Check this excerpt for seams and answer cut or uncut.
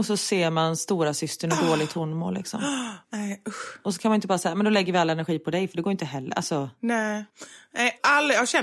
uncut